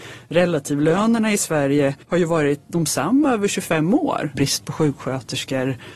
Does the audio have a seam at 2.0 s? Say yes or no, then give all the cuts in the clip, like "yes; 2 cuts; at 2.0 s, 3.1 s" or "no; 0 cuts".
yes; 2 cuts; at 2.0 s, 4.4 s